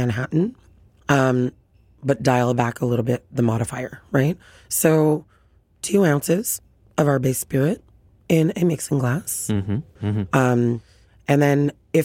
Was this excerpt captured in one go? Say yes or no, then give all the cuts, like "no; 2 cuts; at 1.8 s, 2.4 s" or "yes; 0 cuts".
no; 1 cut; at 10.0 s